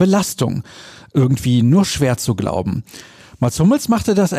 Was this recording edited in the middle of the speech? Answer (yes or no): no